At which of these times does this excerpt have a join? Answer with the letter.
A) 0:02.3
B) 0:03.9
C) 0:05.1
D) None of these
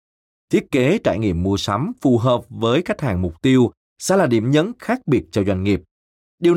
D